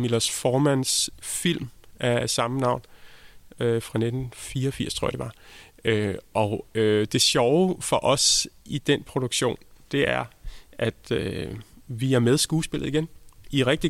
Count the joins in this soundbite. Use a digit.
0